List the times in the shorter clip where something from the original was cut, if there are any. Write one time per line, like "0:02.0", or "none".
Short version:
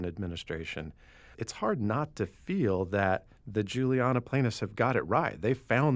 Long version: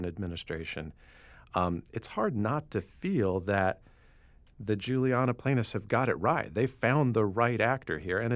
0:01.3
0:03.4